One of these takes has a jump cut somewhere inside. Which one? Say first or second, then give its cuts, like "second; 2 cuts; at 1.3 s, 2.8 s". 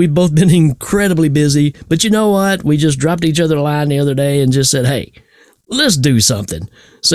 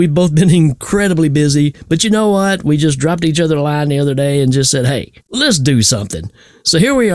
second; 1 cut; at 5.2 s